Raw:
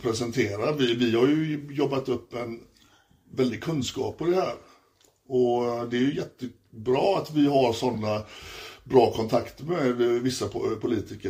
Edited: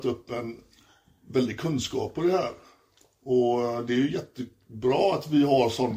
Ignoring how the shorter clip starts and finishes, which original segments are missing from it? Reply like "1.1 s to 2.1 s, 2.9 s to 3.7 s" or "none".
none